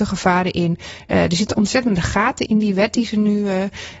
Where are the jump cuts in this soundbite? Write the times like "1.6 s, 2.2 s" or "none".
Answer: 2.5 s